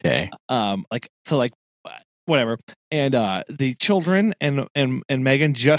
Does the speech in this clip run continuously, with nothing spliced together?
yes; 0 cuts

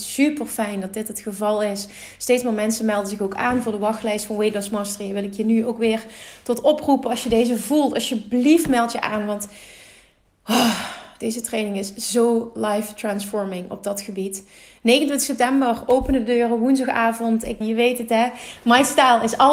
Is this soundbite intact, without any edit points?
no; 1 cut; at 17.6 s

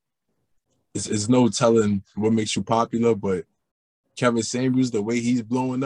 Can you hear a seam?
no; 0 cuts

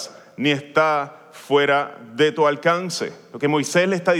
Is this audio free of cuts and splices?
yes; 0 cuts

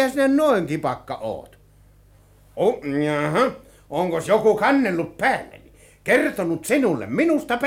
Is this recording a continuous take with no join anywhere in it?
yes; 0 cuts

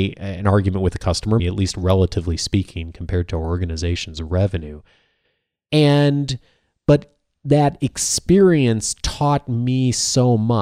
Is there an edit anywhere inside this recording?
yes; 1 cut; at 1.4 s

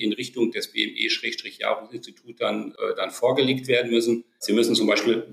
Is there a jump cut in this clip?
no; 0 cuts

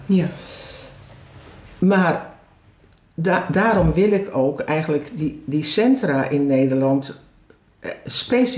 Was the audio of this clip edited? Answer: no; 0 cuts

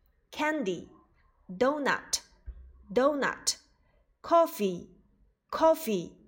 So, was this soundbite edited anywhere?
no; 0 cuts

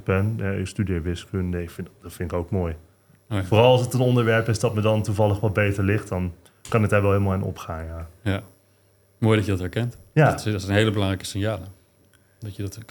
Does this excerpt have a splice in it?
no; 0 cuts

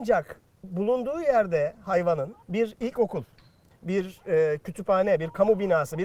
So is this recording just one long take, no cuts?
no; 1 cut; at 2.4 s

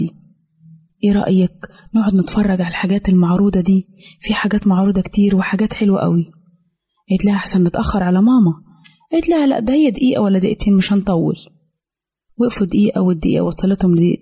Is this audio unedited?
yes; 0 cuts

